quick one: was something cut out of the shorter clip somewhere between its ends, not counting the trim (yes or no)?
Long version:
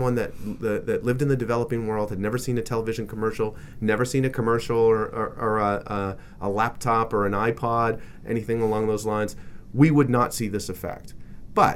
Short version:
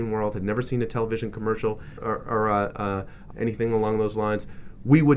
yes